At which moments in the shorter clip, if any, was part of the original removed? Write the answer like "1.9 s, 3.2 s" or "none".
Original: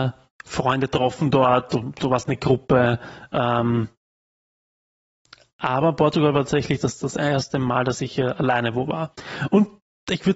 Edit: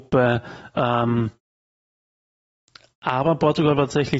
none